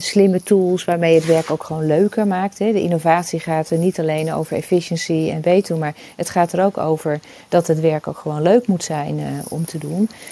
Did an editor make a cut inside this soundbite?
no; 0 cuts

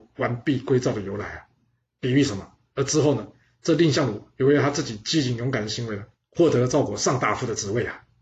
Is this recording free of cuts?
no; 1 cut; at 2.7 s

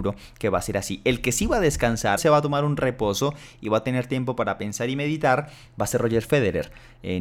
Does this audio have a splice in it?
yes; 1 cut; at 2.2 s

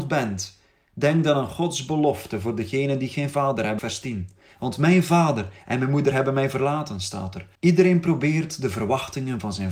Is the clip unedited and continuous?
no; 2 cuts; at 3.8 s, 7.6 s

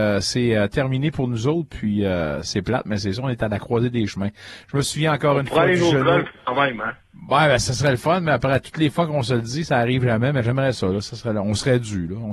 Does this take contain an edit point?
no; 0 cuts

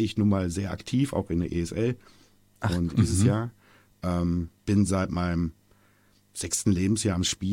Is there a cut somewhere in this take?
yes; 2 cuts; at 2.9 s, 4.6 s

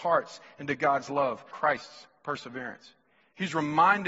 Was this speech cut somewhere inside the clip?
yes; 1 cut; at 1.5 s

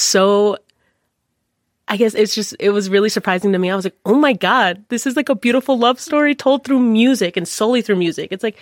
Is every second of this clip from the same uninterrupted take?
yes; 0 cuts

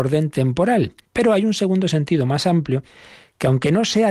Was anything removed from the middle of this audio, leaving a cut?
yes; 1 cut; at 1.0 s

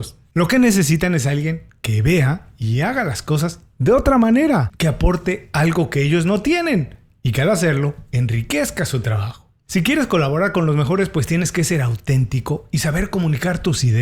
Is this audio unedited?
yes; 0 cuts

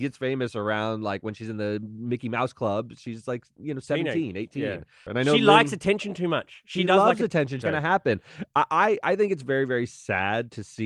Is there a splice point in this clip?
yes; 2 cuts; at 5.1 s, 7.6 s

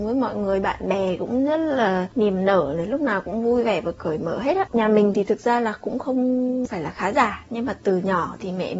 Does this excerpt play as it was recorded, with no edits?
yes; 0 cuts

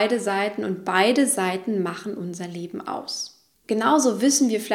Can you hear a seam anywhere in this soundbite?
yes; 1 cut; at 3.5 s

